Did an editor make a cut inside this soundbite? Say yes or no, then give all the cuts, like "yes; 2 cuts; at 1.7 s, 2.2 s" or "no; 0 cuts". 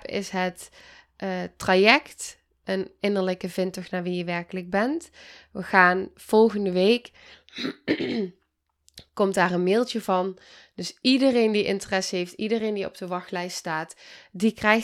no; 0 cuts